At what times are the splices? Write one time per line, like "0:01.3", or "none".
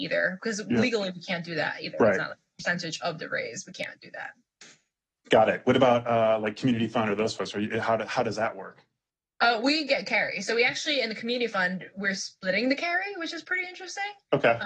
none